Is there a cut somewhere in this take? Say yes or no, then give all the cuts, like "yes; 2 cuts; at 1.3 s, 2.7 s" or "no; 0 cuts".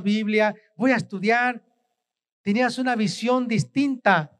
no; 0 cuts